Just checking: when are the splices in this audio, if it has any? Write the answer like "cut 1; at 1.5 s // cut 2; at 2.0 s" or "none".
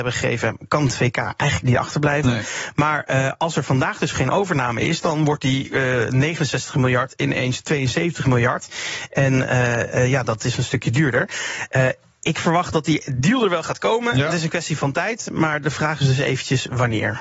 none